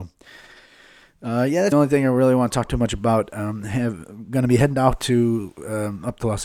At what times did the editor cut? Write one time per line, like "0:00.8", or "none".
0:01.7